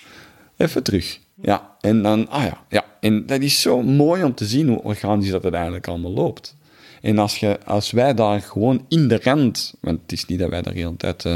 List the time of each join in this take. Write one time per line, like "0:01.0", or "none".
none